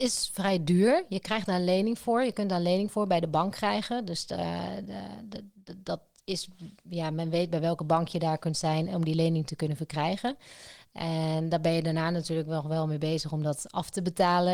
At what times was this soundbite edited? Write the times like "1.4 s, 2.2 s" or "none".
none